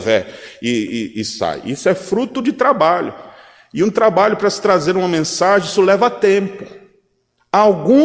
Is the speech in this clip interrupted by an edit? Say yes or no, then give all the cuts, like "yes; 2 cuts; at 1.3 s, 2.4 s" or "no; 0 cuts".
no; 0 cuts